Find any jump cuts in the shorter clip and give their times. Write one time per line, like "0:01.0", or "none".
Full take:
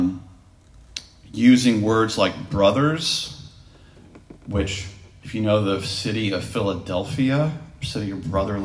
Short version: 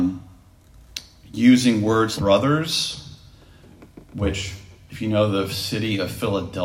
0:02.2